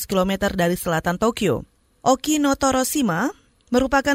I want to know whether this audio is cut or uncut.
cut